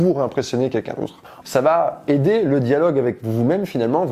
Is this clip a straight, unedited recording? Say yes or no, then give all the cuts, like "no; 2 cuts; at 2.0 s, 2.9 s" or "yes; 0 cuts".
no; 1 cut; at 1.4 s